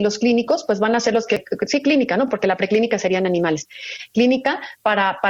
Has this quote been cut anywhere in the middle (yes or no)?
no